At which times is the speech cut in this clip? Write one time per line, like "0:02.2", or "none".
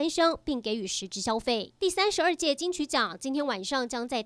0:01.8

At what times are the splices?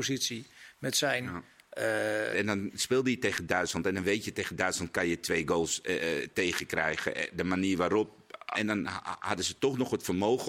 0:02.3
0:08.5

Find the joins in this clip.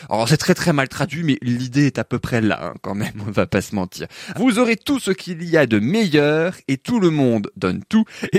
0:04.3

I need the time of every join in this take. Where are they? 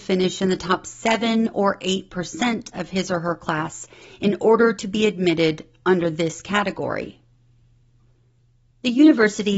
none

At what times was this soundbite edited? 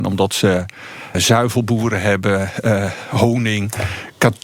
0:01.1

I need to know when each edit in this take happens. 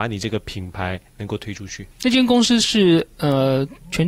0:01.9

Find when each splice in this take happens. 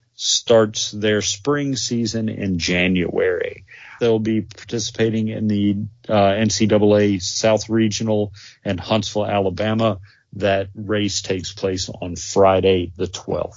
0:04.0

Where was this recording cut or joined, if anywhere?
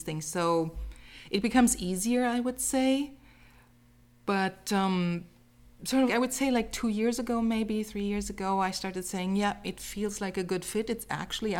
0:06.1

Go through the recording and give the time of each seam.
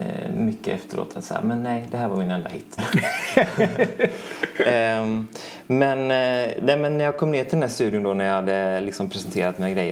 0:02.8

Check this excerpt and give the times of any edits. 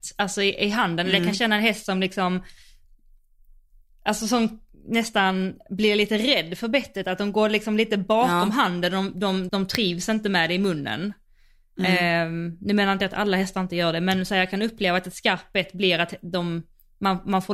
0:09.5

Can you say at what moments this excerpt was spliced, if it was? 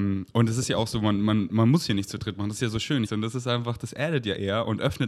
0:03.0

